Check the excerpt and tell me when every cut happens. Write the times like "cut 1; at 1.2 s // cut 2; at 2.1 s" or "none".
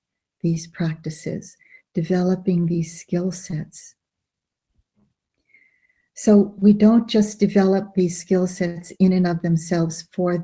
none